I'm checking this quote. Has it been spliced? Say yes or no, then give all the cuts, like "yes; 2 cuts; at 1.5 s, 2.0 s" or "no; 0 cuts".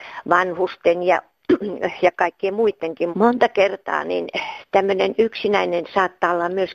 yes; 1 cut; at 3.1 s